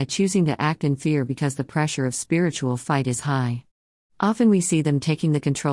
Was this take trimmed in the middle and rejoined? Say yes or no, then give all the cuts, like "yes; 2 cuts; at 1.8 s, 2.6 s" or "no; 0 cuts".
no; 0 cuts